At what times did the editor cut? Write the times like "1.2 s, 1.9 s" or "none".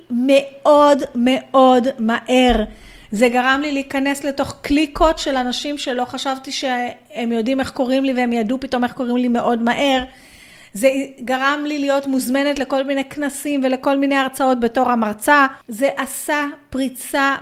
15.6 s

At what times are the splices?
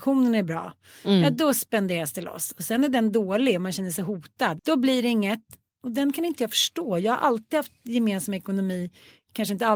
4.6 s

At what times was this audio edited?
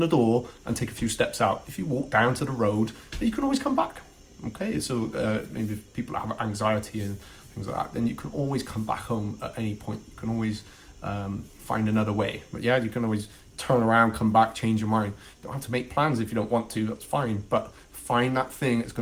11.5 s

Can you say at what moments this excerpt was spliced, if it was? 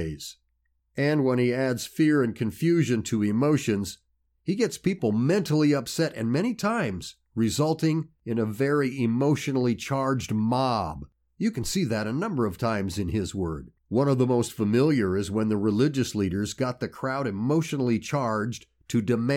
13.8 s

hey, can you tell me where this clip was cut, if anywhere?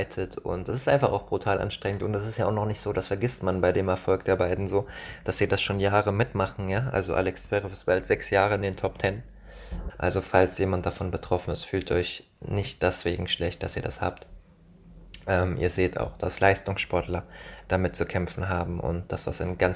9.9 s

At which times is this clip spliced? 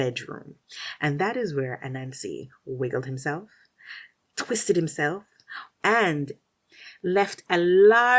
5.7 s

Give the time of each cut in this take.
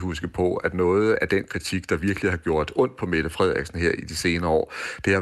1.2 s

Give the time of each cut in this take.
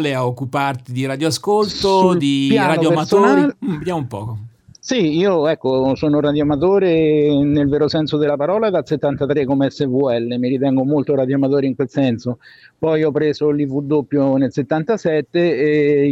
none

